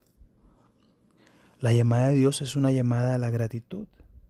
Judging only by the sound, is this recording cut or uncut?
uncut